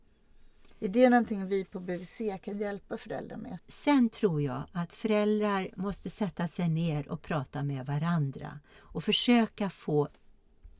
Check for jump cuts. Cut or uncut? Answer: cut